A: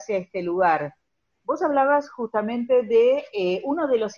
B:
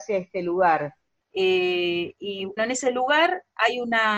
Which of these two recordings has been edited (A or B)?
B